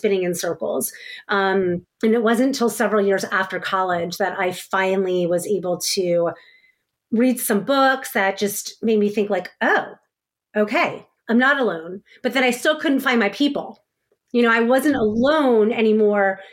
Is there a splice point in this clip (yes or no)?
yes